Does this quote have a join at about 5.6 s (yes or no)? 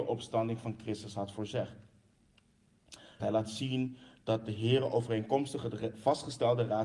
no